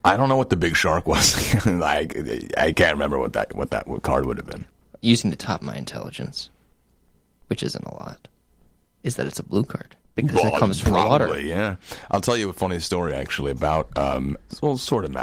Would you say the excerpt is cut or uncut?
uncut